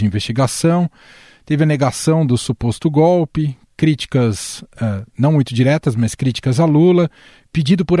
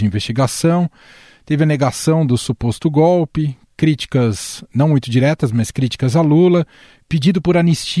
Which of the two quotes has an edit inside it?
second; 1 cut; at 4.7 s

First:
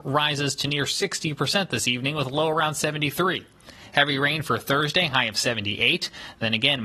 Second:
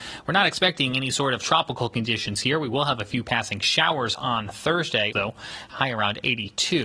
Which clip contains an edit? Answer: second; 1 cut; at 5.1 s

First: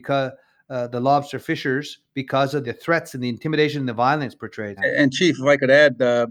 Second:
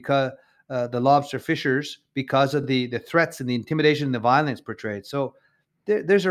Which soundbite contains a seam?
first; 2 cuts; at 2.6 s, 4.8 s

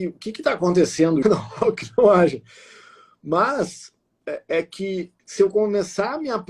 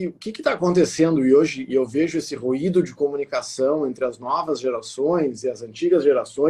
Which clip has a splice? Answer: first; 2 cuts; at 1.2 s, 5.2 s

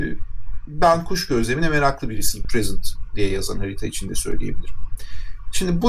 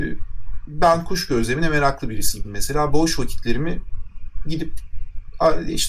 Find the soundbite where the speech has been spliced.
first; 1 cut; at 2.4 s

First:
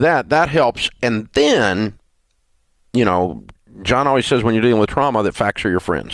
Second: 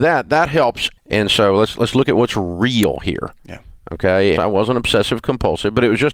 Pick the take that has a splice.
second; 2 cuts; at 1.0 s, 4.4 s

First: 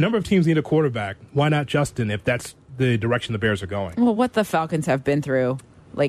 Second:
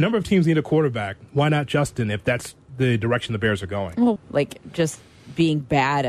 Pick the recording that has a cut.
second; 1 cut; at 4.2 s

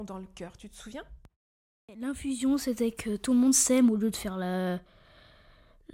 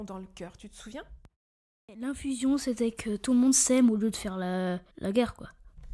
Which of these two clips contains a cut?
second; 1 cut; at 4.9 s

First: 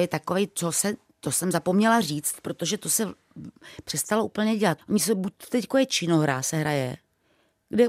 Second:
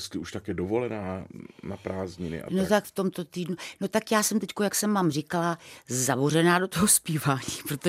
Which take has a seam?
first; 1 cut; at 4.8 s

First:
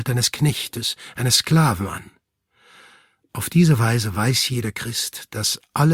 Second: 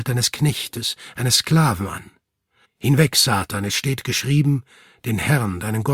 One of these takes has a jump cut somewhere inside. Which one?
second; 1 cut; at 2.6 s

